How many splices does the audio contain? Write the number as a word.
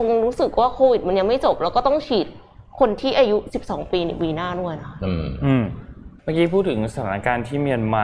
one